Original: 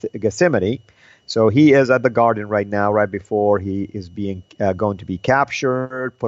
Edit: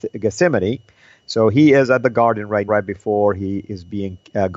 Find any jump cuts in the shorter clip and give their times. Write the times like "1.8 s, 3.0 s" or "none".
2.7 s